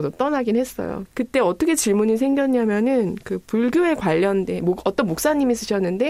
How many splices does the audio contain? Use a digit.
1